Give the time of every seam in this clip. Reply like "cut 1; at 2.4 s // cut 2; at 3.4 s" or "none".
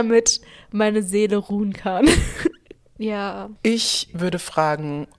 cut 1; at 3.0 s